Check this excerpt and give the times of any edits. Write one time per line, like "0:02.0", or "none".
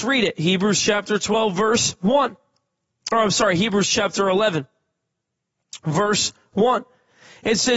none